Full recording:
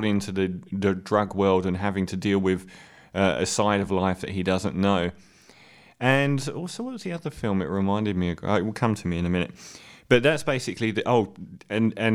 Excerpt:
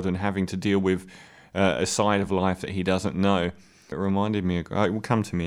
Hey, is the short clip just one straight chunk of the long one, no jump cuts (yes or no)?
no